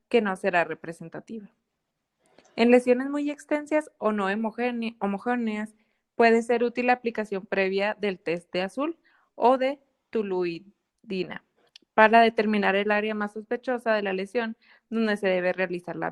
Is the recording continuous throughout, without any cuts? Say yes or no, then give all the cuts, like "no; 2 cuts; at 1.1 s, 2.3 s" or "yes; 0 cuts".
yes; 0 cuts